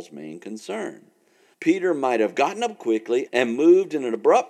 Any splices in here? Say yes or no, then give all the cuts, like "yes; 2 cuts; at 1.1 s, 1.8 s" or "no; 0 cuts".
yes; 2 cuts; at 1.5 s, 3.3 s